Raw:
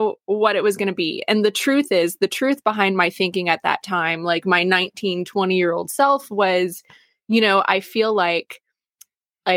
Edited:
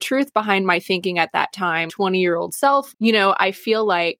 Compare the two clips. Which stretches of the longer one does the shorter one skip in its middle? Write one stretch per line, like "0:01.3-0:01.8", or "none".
0:04.2-0:05.2
0:06.3-0:07.2